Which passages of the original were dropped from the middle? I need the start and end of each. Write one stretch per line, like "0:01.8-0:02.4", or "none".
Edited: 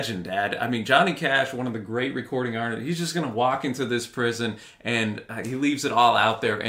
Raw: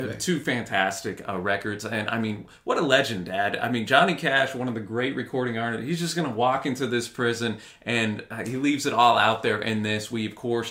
none